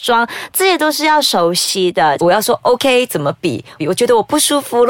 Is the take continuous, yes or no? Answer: no